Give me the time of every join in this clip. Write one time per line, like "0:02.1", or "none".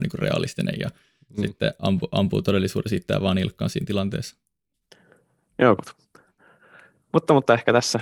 0:05.8

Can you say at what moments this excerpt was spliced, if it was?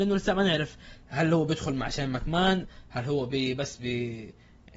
none

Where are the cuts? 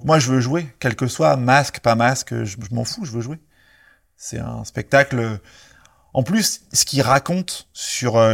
none

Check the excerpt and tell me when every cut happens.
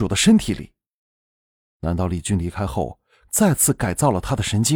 0:03.2

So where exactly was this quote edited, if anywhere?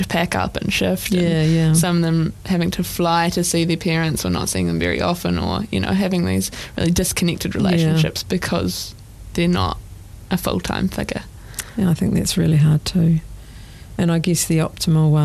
none

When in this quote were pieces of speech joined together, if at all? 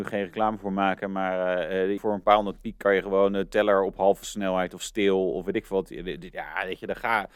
0:02.0

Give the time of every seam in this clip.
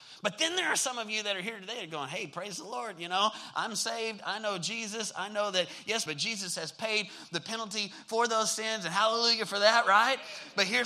0:06.1

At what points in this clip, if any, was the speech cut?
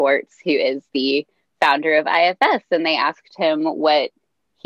none

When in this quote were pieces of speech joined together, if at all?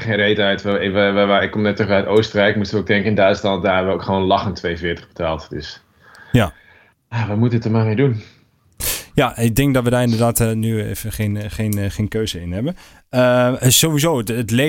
none

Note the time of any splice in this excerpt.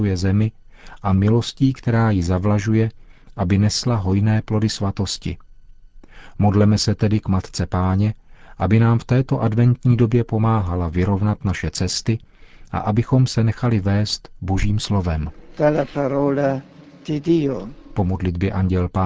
none

